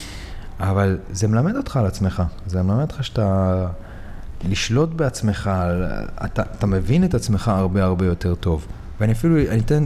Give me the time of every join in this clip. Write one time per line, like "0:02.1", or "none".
none

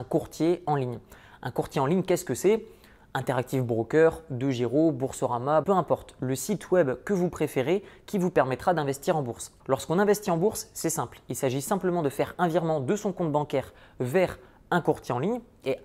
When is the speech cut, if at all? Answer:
0:05.6
0:09.6

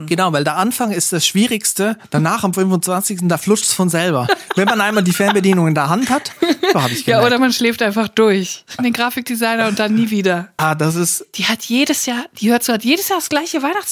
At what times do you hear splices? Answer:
0:06.7
0:08.8
0:10.6

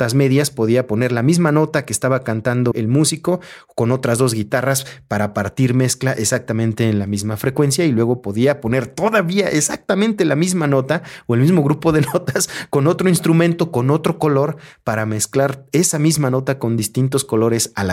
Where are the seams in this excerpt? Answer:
0:02.7

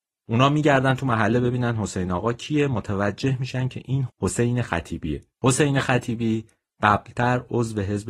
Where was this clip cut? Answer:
0:04.1
0:05.3

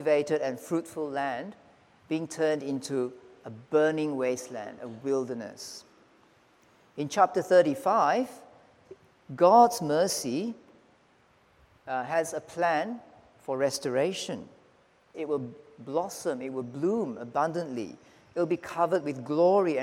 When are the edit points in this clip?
0:15.1

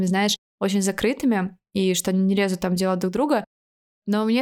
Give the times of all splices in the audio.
none

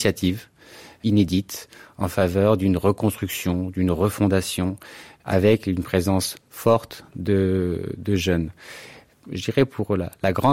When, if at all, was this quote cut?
none

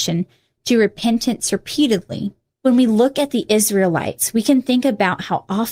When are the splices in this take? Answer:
0:02.5

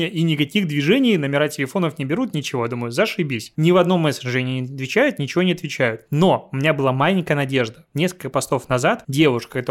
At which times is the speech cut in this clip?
none

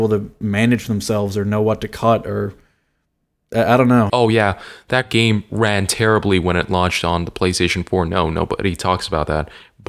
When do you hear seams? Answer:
0:04.1

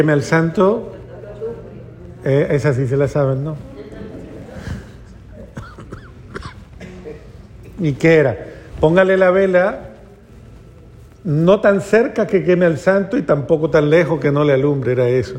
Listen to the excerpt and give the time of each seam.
none

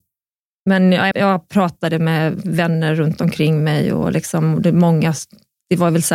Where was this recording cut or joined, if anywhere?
0:01.1

